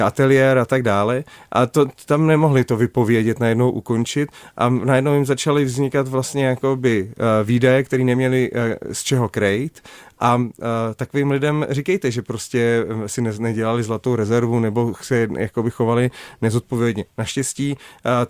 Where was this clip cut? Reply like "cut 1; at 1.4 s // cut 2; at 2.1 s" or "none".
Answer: none